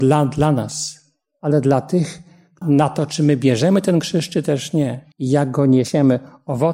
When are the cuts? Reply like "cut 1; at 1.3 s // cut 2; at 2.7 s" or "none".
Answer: cut 1; at 2.6 s // cut 2; at 5.1 s